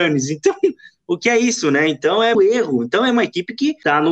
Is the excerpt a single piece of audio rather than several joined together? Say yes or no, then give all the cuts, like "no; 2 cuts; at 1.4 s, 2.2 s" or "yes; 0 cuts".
no; 1 cut; at 2.3 s